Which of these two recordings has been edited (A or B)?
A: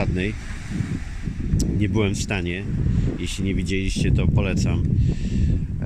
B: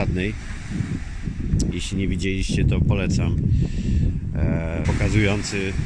B